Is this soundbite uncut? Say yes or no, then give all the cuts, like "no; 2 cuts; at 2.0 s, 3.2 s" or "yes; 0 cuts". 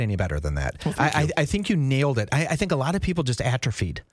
yes; 0 cuts